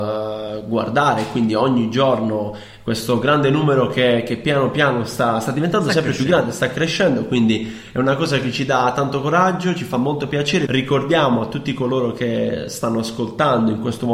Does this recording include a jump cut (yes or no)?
yes